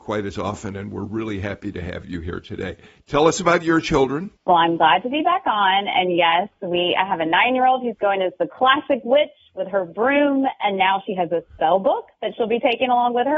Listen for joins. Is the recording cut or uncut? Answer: cut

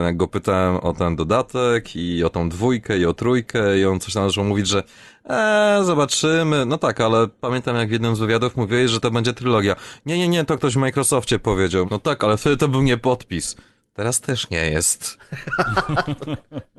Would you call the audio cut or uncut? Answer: cut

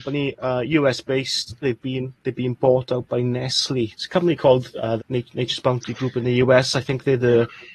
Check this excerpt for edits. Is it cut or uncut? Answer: cut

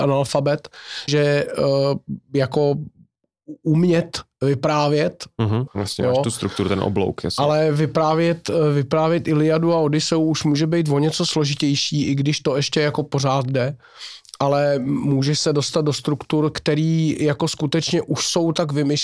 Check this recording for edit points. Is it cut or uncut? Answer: cut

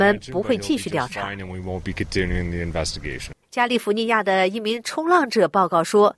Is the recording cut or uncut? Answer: cut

